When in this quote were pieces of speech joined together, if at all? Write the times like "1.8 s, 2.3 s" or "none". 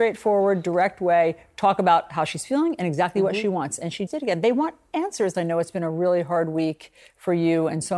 4.1 s, 5.3 s

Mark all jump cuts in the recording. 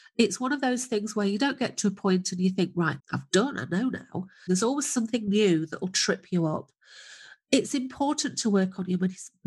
3.0 s, 4.5 s

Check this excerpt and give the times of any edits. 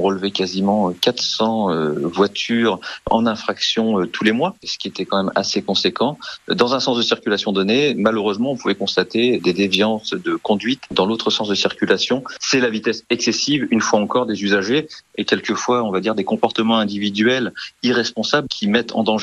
9.4 s

